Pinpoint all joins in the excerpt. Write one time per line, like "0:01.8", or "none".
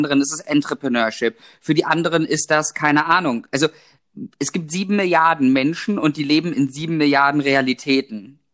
none